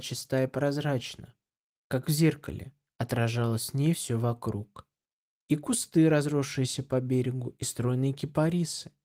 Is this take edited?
no; 0 cuts

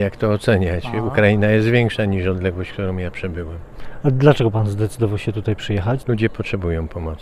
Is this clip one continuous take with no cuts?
no; 1 cut; at 6.0 s

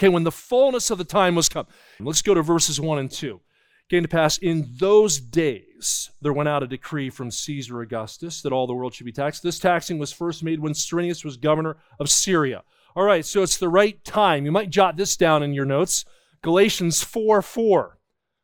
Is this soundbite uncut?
no; 1 cut; at 2.0 s

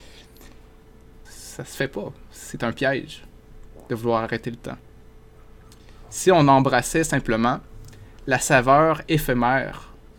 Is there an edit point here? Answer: yes; 1 cut; at 1.3 s

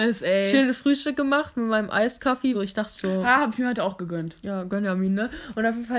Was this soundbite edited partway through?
yes; 1 cut; at 2.5 s

